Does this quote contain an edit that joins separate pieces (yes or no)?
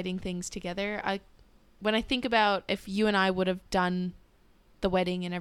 no